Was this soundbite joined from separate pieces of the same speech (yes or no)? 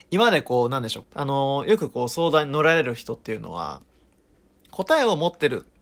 yes